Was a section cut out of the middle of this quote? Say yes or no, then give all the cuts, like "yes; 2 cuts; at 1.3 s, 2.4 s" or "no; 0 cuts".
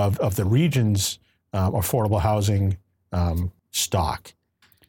yes; 1 cut; at 3.6 s